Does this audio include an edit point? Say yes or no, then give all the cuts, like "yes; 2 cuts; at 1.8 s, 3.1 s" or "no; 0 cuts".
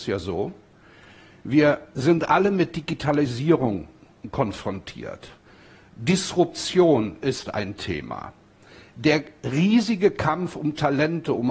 no; 0 cuts